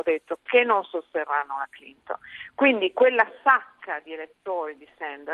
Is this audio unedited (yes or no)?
yes